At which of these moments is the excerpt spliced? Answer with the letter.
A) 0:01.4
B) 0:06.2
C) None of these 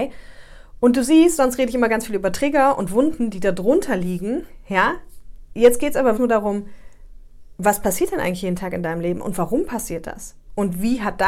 B